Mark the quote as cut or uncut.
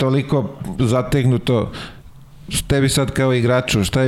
uncut